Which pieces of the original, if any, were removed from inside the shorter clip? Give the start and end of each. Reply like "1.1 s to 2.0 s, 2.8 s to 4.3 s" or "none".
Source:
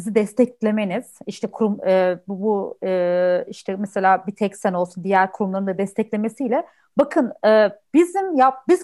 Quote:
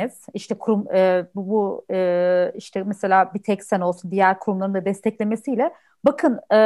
none